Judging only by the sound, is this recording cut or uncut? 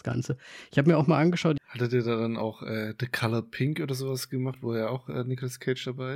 cut